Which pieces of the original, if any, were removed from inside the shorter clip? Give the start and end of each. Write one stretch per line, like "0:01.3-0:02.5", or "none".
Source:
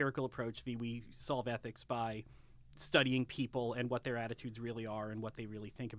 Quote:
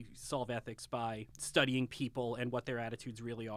0:02.3-0:02.7